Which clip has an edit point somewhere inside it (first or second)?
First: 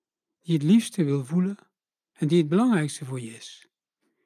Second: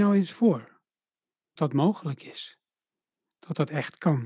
second